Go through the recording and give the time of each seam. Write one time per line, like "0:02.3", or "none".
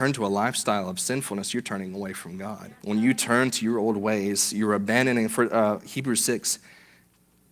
0:02.8